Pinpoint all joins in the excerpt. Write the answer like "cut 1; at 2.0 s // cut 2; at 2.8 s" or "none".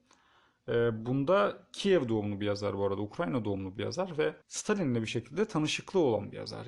cut 1; at 4.4 s

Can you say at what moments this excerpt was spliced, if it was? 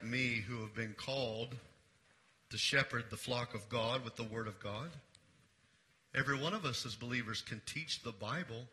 none

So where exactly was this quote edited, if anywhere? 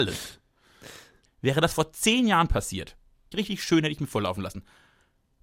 cut 1; at 1.3 s // cut 2; at 3.3 s

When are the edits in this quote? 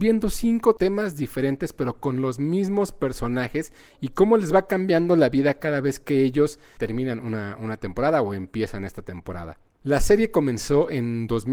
none

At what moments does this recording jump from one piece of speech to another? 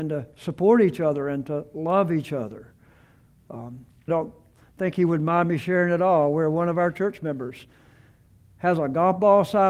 cut 1; at 4.1 s

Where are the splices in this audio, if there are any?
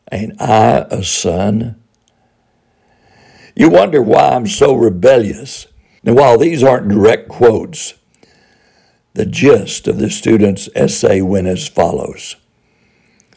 cut 1; at 6.0 s

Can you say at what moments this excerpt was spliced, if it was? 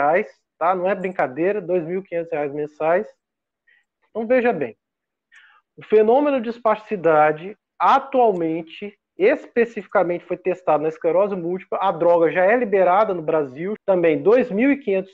cut 1; at 4.1 s // cut 2; at 13.8 s

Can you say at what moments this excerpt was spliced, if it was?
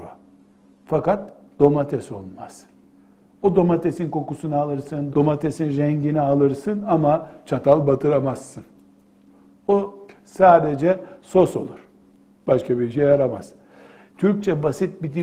cut 1; at 5.1 s // cut 2; at 14.1 s

